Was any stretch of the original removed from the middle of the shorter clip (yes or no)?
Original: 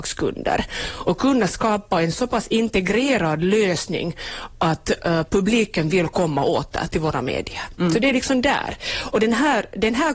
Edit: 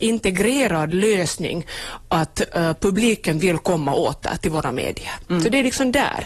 no